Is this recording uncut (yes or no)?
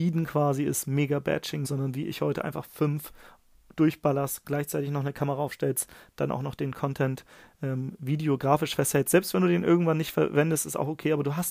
no